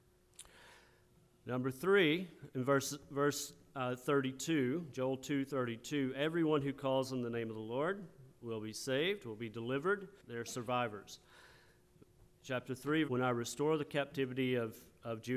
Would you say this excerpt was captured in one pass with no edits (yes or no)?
no